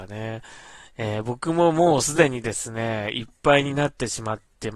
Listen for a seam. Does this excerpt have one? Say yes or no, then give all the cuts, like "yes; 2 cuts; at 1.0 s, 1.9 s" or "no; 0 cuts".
no; 0 cuts